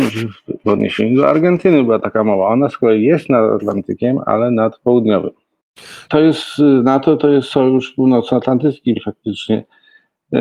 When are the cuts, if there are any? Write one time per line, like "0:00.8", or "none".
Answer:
0:06.1
0:09.0